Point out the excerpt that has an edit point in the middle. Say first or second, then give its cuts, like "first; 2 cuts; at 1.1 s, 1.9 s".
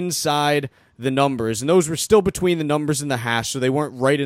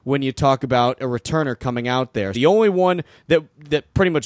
second; 1 cut; at 2.3 s